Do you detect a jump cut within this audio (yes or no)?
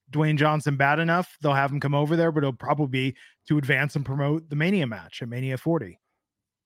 no